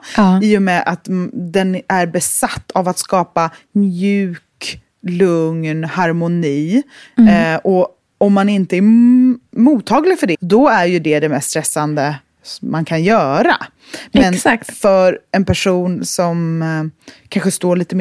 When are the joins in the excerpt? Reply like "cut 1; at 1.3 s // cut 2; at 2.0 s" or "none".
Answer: cut 1; at 10.3 s